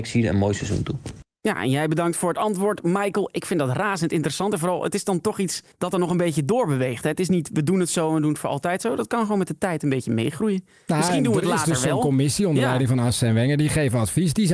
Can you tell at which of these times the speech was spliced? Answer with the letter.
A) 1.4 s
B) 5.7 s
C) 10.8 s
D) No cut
B